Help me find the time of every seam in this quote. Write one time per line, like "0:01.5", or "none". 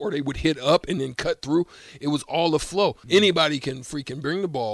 0:03.0